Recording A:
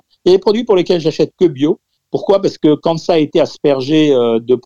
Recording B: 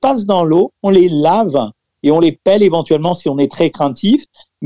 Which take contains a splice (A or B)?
A